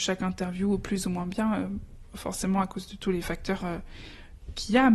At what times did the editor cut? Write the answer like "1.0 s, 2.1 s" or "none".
none